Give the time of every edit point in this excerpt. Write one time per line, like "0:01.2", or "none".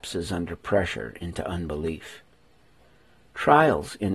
none